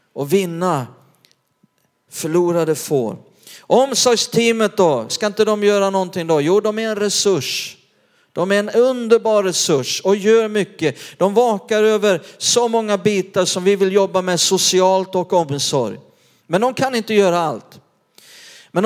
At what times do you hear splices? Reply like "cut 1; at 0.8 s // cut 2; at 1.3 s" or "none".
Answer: cut 1; at 5.1 s